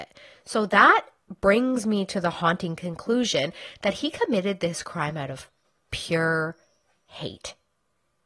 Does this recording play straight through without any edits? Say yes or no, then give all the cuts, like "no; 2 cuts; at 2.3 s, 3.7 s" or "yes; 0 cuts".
yes; 0 cuts